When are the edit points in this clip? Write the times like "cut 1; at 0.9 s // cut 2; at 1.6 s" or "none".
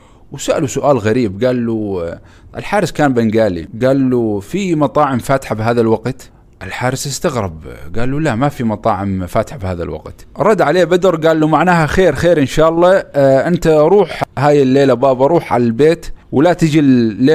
cut 1; at 16.2 s